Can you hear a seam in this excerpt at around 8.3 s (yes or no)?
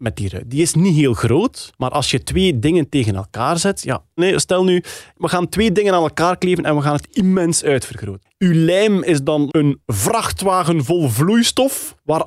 yes